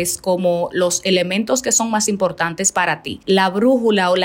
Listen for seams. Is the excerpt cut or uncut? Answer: cut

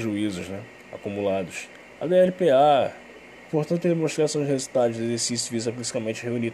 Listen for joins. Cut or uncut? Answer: cut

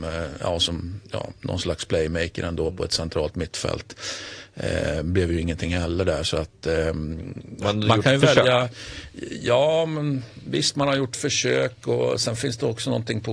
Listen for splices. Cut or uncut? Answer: uncut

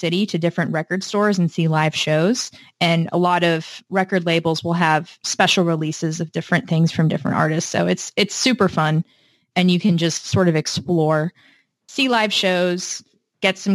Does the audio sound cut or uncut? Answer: uncut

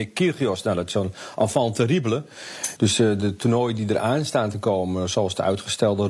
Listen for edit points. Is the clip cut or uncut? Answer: cut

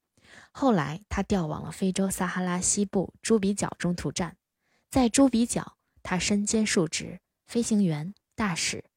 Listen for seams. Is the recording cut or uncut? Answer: uncut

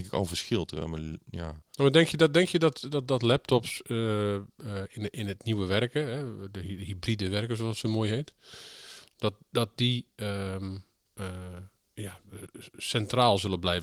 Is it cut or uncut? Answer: uncut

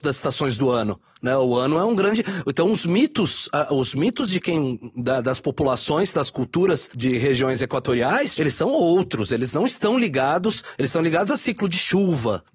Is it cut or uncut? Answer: cut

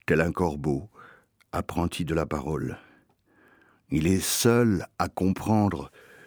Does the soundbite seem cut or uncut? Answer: uncut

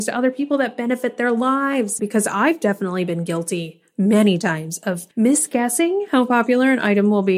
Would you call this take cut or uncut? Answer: cut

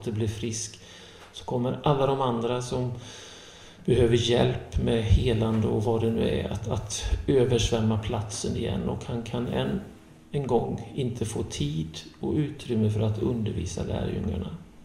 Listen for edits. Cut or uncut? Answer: uncut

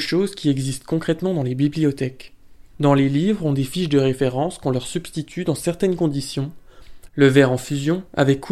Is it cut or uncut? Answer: cut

